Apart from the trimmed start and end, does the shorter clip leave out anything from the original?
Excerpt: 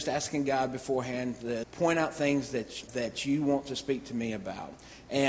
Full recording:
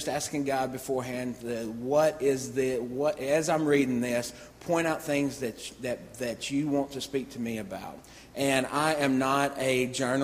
yes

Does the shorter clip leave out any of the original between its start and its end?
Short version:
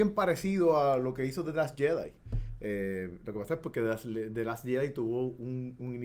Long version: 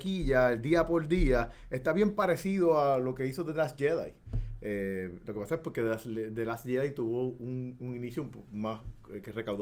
no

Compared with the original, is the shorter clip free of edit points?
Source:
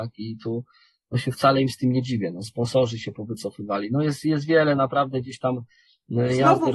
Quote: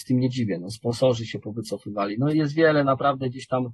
no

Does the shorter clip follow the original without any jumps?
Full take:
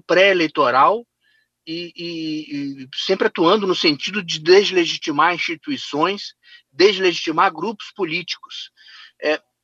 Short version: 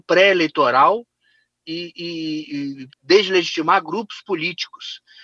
no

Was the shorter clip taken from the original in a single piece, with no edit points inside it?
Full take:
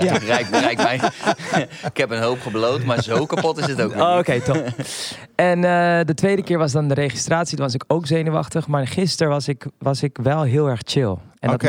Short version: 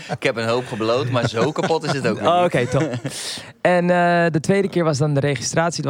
yes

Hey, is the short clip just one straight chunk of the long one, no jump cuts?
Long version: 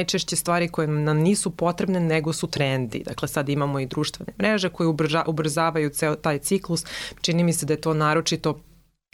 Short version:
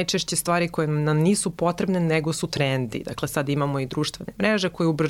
yes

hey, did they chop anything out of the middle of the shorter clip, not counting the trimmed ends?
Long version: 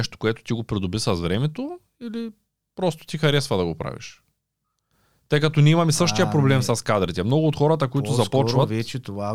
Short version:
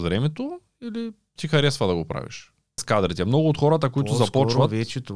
yes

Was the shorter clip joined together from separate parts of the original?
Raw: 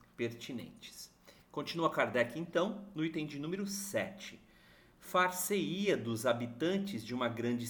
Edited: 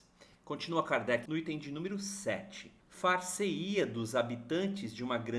yes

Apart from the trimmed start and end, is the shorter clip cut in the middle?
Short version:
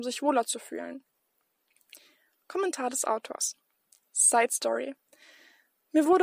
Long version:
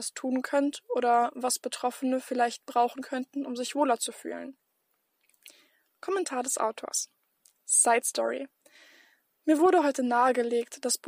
no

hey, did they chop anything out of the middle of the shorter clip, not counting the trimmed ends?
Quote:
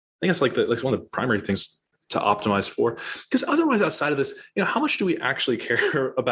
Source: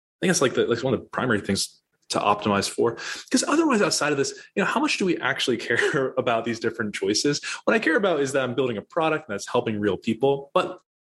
no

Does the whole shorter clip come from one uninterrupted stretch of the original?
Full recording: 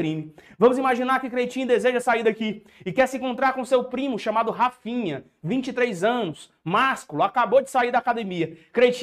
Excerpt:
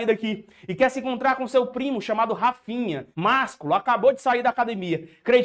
no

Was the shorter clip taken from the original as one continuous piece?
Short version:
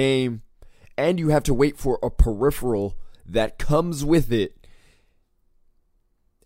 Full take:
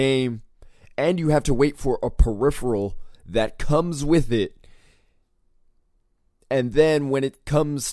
yes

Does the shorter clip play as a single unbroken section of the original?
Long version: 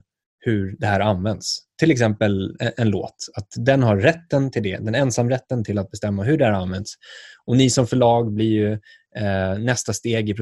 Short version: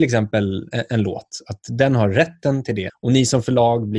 no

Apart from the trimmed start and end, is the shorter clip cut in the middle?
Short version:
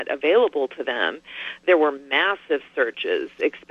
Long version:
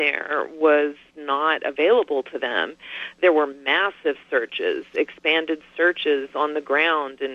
no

